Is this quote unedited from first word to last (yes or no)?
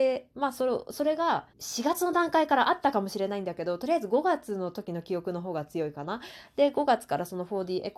no